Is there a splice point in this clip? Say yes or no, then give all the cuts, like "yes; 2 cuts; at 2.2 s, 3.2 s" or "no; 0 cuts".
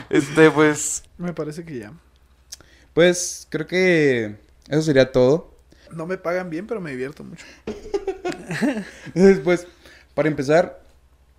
yes; 2 cuts; at 1.1 s, 5.9 s